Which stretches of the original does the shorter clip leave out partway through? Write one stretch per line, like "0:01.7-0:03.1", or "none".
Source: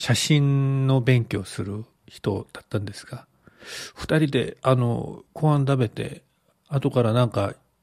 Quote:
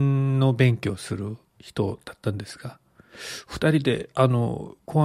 none